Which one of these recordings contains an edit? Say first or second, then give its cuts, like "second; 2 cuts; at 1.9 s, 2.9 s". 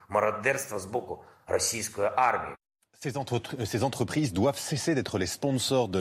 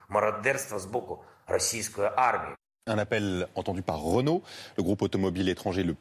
second; 1 cut; at 2.9 s